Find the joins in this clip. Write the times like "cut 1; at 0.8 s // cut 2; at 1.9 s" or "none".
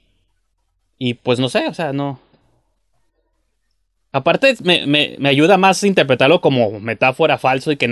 none